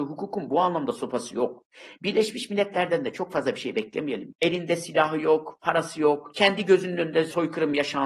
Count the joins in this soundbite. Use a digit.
1